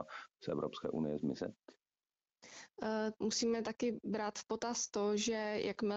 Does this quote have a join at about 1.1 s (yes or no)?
no